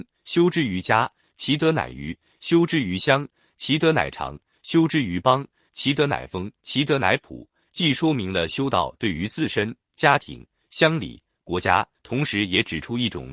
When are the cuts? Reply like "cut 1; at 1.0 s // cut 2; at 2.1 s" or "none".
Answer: cut 1; at 6.6 s // cut 2; at 11.9 s